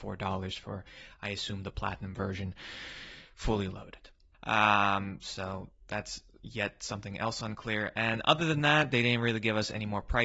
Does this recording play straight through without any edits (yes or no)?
no